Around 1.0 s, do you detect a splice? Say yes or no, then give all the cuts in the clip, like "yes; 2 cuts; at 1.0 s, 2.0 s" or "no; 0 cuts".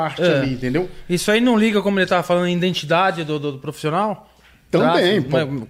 no; 0 cuts